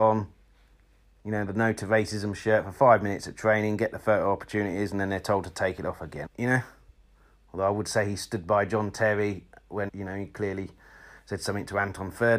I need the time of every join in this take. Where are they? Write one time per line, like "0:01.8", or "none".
0:06.3
0:09.9

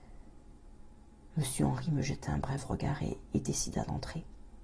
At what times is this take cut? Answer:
none

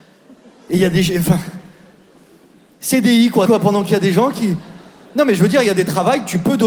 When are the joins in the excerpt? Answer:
0:03.5

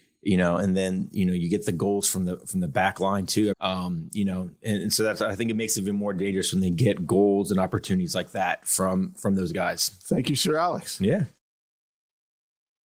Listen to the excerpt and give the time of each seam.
0:03.5

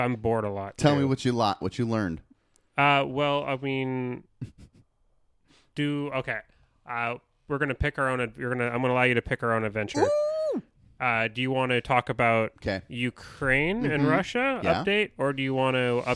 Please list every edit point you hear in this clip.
0:01.6

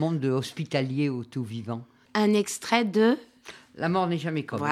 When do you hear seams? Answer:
0:02.1

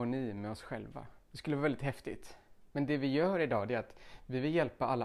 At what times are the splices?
0:01.3

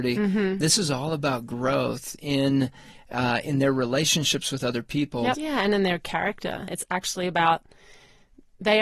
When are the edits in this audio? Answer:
0:05.3
0:06.7

